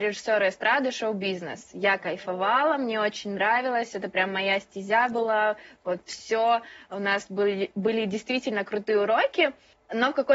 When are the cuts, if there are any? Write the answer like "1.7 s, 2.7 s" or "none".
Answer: none